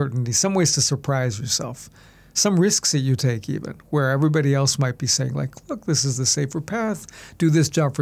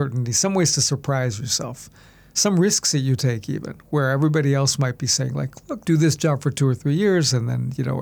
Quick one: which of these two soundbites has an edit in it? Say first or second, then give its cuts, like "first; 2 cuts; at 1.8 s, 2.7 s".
second; 1 cut; at 5.8 s